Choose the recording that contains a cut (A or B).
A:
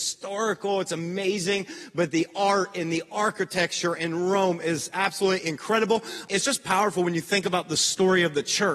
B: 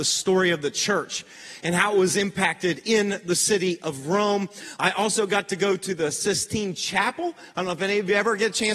A